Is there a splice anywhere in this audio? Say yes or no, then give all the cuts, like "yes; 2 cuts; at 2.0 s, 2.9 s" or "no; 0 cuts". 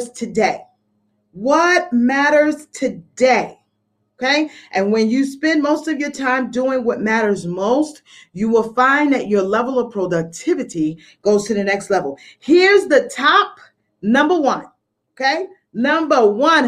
no; 0 cuts